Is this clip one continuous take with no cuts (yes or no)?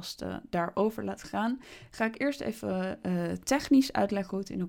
yes